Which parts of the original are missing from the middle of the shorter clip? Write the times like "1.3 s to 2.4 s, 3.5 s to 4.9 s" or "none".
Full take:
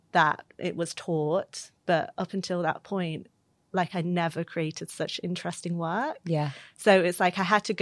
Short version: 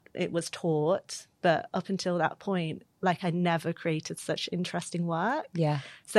3.3 s to 3.6 s